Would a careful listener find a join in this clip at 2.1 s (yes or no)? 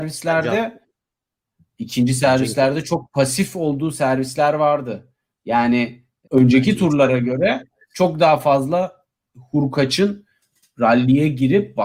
no